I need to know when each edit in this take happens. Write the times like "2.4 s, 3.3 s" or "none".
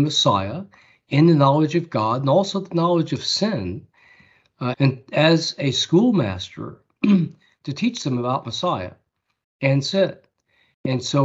4.7 s